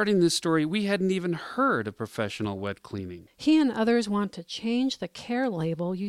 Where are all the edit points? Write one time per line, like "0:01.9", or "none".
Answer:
0:03.3